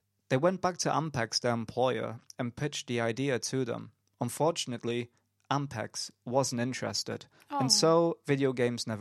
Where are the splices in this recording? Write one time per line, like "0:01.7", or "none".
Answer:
none